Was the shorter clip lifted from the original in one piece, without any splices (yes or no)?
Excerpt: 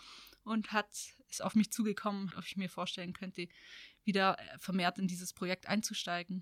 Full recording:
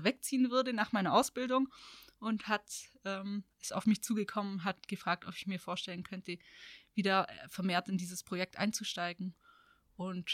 no